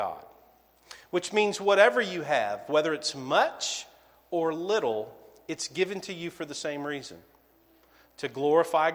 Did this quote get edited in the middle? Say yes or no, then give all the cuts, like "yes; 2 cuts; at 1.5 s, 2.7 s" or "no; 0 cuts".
no; 0 cuts